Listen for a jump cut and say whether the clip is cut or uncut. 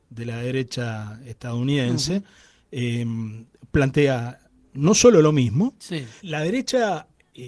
cut